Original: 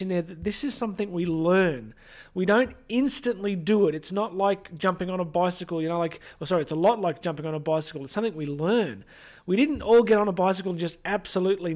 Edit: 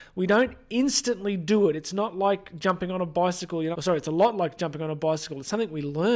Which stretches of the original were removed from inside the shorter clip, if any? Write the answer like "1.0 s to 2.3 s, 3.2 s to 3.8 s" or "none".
5.9 s to 6.4 s